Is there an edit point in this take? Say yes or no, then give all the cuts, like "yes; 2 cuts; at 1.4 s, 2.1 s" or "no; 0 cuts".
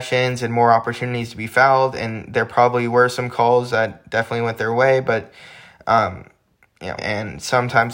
yes; 1 cut; at 7.0 s